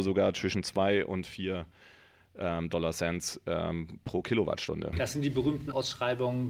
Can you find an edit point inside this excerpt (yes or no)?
no